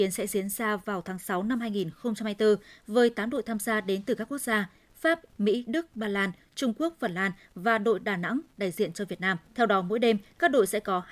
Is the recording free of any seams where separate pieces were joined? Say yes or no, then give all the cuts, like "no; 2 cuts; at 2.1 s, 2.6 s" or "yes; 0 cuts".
no; 2 cuts; at 5.3 s, 9.5 s